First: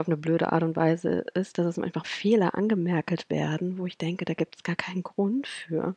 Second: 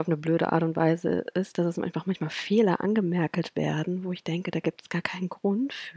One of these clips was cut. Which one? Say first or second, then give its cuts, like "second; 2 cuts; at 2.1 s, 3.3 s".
first; 1 cut; at 2.0 s